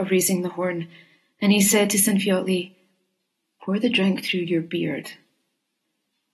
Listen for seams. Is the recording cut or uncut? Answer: uncut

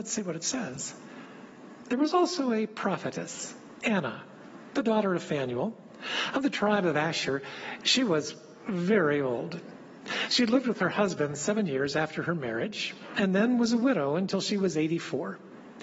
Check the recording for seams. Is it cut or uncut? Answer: uncut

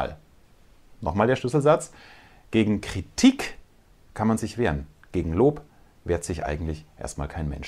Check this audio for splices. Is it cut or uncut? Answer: uncut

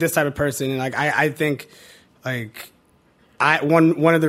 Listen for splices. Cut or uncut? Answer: uncut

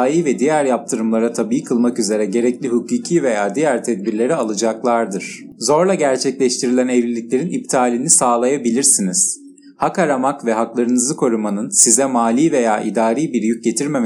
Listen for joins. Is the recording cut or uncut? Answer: uncut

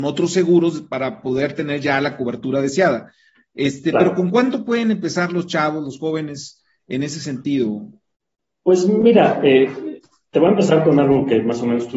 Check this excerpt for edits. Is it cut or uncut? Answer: uncut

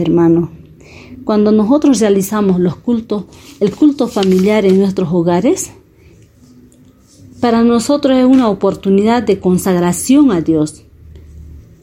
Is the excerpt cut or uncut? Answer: uncut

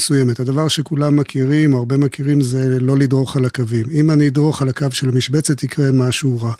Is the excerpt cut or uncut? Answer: uncut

